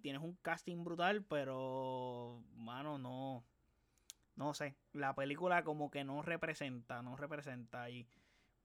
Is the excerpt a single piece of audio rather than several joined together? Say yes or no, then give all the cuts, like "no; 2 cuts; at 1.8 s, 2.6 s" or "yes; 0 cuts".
yes; 0 cuts